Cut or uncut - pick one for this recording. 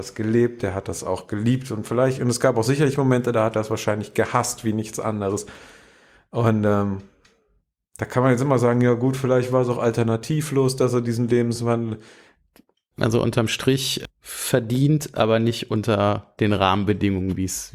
cut